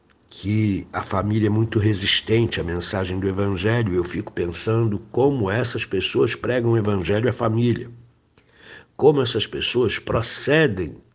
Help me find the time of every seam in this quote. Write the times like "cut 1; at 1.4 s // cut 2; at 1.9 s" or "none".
none